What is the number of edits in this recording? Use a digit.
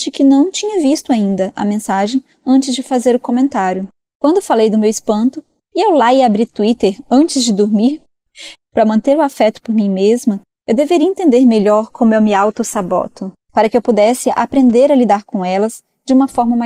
3